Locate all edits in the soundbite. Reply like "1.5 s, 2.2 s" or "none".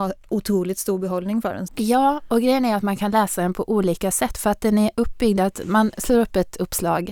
1.7 s